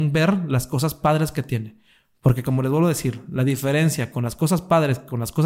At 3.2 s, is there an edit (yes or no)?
no